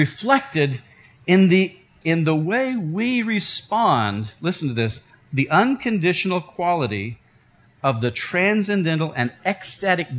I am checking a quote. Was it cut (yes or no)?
yes